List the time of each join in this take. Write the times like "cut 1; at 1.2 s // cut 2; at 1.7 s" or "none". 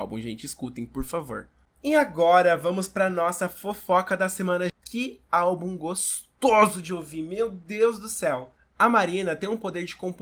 cut 1; at 4.7 s